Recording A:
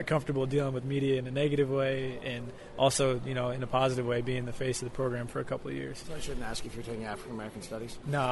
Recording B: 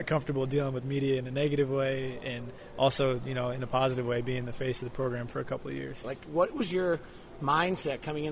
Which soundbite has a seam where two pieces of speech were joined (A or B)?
B